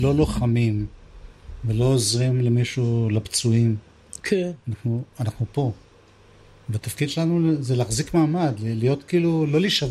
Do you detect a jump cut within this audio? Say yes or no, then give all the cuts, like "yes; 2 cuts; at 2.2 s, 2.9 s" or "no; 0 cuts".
no; 0 cuts